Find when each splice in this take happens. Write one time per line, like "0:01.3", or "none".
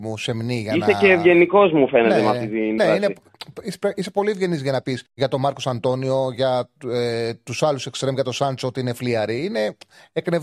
0:02.8
0:05.1